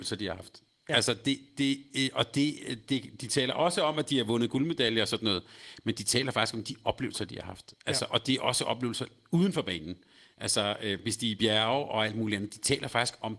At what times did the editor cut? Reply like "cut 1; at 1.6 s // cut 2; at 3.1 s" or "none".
none